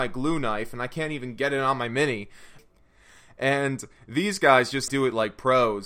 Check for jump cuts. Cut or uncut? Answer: cut